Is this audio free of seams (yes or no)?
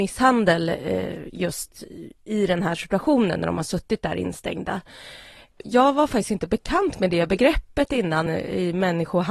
no